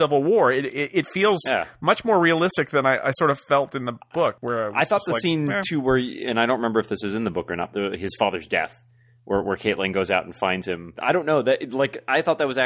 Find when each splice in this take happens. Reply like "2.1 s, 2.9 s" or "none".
7.7 s, 11.0 s